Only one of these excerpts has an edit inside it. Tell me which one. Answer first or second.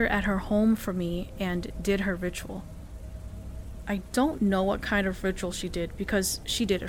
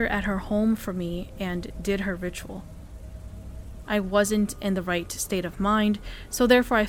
second